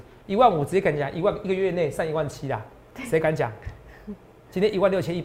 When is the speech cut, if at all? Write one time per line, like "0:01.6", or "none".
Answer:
none